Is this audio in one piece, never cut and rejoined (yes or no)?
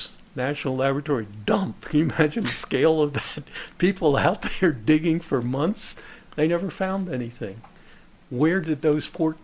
yes